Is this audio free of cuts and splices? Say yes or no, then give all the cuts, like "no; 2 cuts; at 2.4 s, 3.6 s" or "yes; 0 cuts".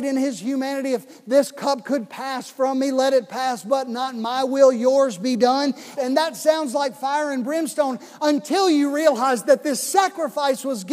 no; 1 cut; at 5.9 s